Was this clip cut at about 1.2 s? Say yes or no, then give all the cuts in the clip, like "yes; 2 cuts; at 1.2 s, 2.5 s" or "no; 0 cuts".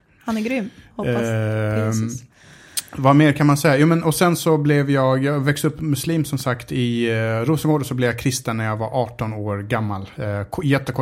no; 0 cuts